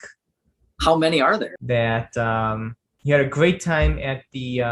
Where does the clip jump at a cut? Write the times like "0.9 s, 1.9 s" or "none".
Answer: 1.6 s